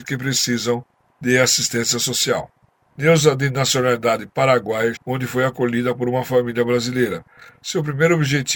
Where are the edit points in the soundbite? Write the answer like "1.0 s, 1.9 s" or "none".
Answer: 2.8 s, 4.9 s